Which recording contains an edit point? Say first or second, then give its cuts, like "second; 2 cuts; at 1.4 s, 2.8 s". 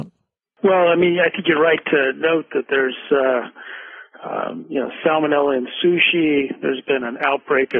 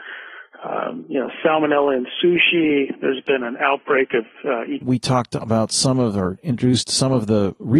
second; 1 cut; at 4.8 s